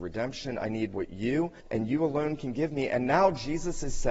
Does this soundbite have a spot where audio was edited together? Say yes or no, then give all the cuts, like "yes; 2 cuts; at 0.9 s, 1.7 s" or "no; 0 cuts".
yes; 1 cut; at 1.6 s